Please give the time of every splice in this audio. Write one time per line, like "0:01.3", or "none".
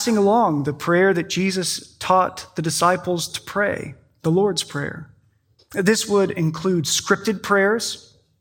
0:05.6